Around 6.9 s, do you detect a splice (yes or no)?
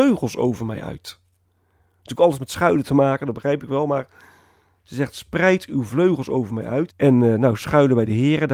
yes